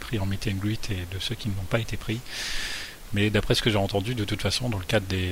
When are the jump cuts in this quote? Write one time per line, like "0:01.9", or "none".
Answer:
none

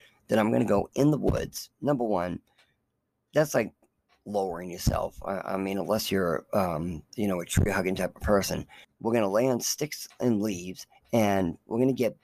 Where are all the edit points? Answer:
0:08.8
0:10.9

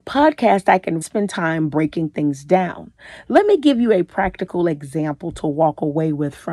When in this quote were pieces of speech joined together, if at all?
0:01.0

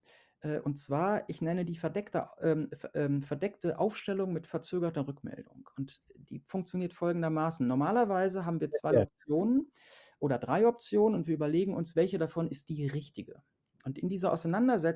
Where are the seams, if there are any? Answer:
none

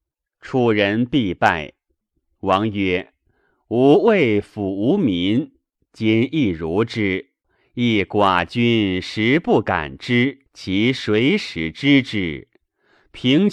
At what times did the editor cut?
0:02.0
0:07.4
0:10.5

